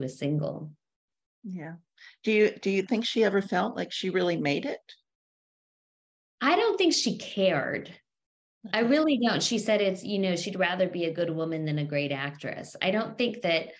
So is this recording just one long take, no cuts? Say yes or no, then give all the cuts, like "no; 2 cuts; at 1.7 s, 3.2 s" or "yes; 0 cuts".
yes; 0 cuts